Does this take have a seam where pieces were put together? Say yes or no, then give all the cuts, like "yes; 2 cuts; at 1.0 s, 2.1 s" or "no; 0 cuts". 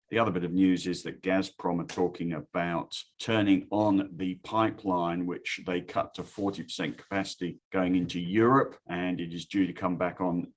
no; 0 cuts